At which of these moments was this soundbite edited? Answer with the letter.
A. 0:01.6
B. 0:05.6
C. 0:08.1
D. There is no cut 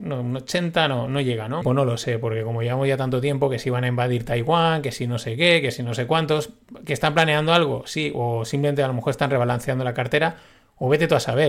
A